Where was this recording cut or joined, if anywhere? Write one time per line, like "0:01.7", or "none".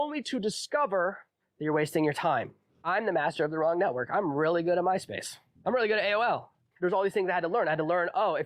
0:06.7